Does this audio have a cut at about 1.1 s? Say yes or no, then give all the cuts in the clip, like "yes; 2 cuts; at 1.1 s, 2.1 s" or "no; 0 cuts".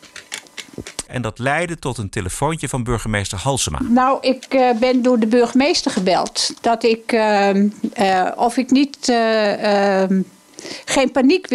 yes; 1 cut; at 1.1 s